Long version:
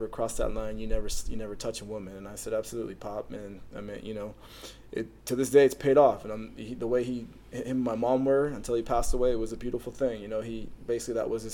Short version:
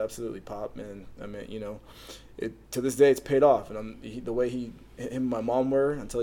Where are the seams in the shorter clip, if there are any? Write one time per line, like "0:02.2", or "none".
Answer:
none